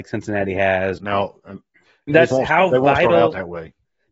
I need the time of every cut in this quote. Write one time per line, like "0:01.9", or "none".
0:01.0
0:02.3